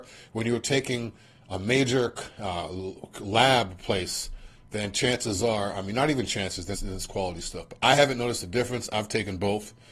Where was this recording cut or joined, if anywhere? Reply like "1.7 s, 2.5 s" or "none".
6.7 s